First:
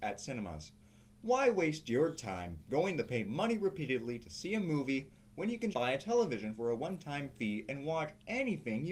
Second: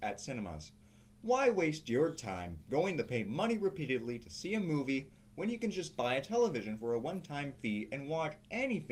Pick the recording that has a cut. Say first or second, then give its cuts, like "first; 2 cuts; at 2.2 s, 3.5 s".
first; 1 cut; at 5.7 s